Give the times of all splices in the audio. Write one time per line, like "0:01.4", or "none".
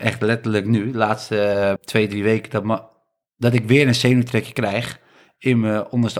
0:01.8